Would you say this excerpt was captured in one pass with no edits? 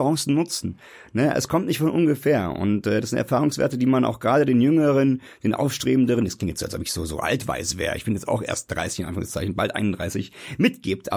yes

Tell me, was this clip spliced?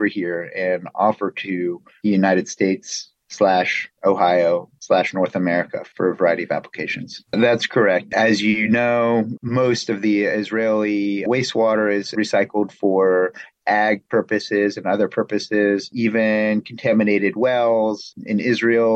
yes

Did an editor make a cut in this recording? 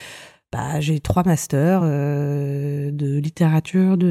no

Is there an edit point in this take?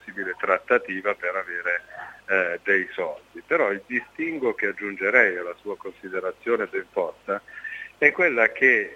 no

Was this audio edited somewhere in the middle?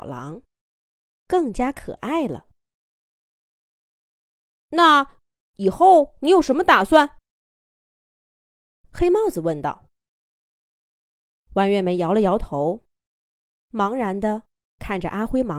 no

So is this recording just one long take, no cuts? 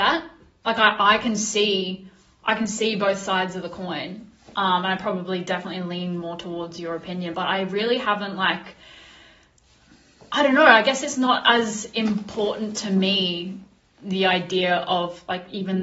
yes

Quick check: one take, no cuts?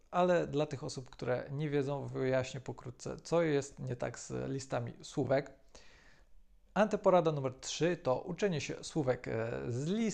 no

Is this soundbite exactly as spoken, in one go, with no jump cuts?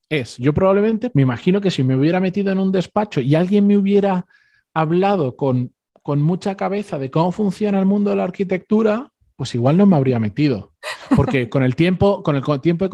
no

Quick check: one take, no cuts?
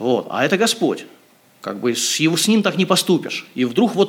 yes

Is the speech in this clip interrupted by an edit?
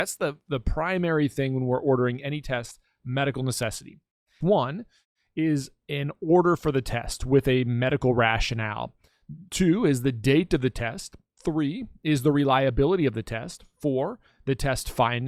yes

